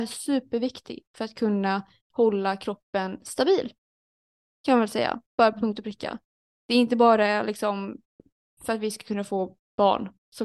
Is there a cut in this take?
no; 0 cuts

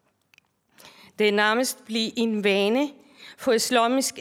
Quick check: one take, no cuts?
yes; 0 cuts

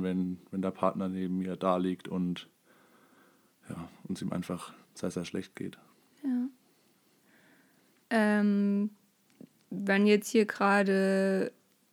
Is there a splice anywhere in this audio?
no; 0 cuts

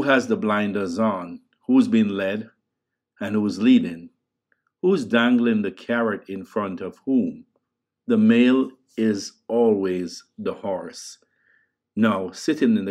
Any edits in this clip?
yes; 1 cut; at 8.0 s

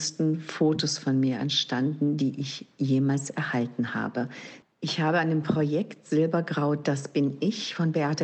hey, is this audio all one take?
no; 1 cut; at 4.6 s

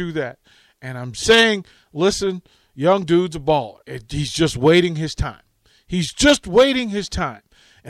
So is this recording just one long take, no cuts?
no; 1 cut; at 3.8 s

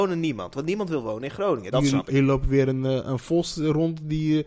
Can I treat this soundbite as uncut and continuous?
no; 1 cut; at 1.7 s

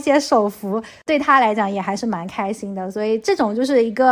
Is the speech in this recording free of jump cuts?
yes; 0 cuts

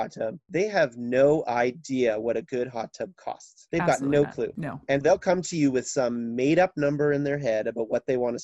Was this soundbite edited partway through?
yes; 1 cut; at 5.0 s

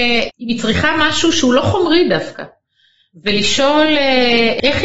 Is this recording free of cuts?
yes; 0 cuts

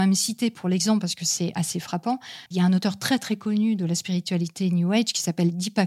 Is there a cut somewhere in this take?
yes; 1 cut; at 2.5 s

